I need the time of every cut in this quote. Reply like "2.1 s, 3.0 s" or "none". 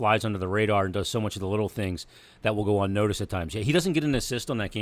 none